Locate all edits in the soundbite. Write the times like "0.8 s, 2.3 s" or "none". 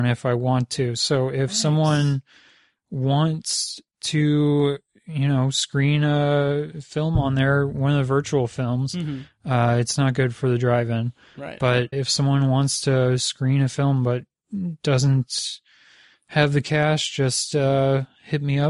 11.9 s